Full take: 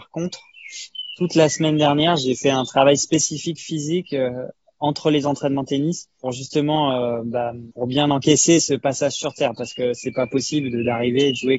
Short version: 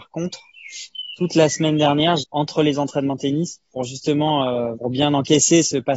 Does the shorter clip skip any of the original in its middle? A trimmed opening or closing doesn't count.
yes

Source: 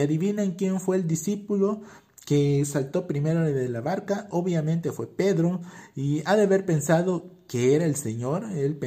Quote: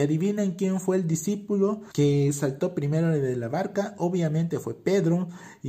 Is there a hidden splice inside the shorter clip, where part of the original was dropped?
yes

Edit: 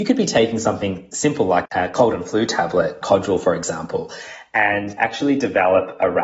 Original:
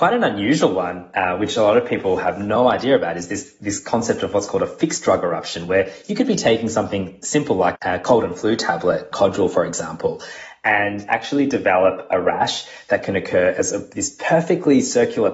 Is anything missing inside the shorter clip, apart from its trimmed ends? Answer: no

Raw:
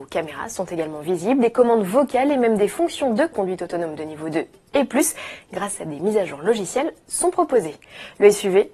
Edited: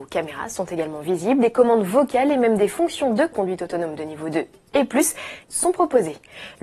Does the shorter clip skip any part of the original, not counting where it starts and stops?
yes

